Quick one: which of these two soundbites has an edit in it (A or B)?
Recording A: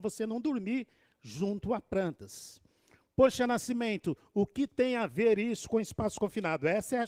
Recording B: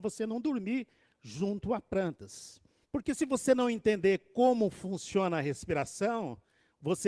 B